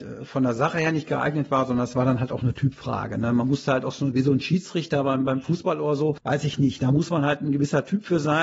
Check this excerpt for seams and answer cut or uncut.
uncut